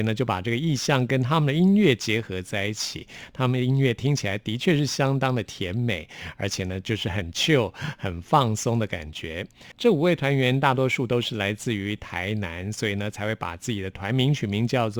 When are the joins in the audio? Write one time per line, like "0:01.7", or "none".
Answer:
none